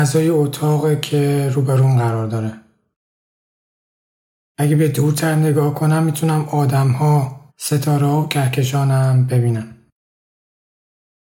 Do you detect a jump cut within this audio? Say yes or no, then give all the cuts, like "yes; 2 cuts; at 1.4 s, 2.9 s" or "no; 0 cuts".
yes; 2 cuts; at 4.4 s, 7.5 s